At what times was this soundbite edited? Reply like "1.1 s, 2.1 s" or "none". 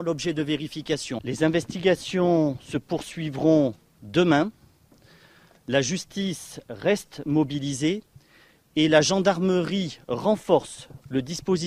1.2 s